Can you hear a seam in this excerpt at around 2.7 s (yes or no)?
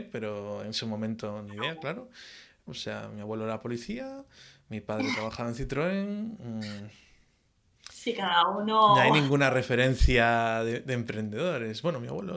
yes